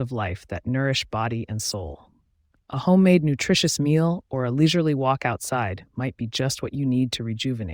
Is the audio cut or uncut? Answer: uncut